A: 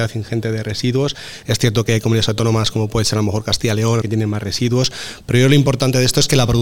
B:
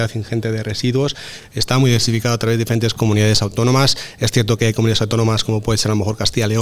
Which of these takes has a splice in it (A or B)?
A